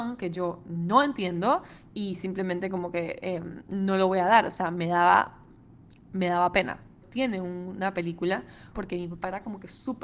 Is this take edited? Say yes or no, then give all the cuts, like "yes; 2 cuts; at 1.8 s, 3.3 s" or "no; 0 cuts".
yes; 2 cuts; at 7.0 s, 8.7 s